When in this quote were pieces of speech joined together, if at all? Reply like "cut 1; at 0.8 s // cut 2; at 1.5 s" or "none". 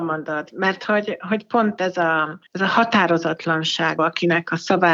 cut 1; at 2.5 s // cut 2; at 4.0 s